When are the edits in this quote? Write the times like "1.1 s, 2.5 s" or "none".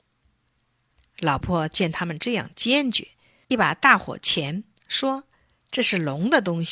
1.4 s, 3.4 s